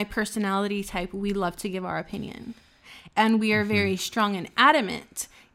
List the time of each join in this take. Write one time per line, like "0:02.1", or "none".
none